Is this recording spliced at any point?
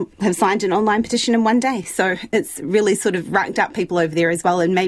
no; 0 cuts

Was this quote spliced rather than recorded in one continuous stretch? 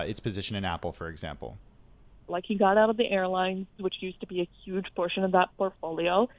yes; 2 cuts; at 2.3 s, 3.8 s

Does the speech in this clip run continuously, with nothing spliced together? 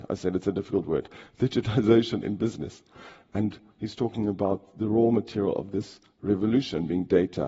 yes; 0 cuts

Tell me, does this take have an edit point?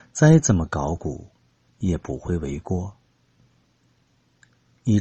no; 0 cuts

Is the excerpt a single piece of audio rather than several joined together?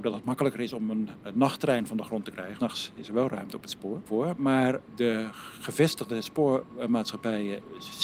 no; 2 cuts; at 2.6 s, 4.9 s

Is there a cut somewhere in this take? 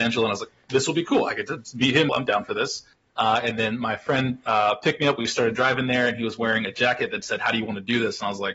yes; 1 cut; at 2.1 s

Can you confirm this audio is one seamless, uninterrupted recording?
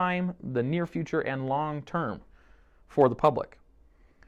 yes; 0 cuts

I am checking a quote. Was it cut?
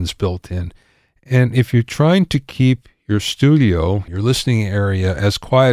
yes; 1 cut; at 4.1 s

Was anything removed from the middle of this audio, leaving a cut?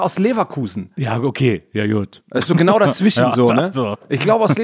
no; 0 cuts

